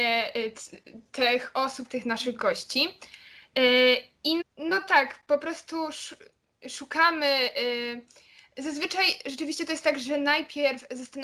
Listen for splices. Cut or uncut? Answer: cut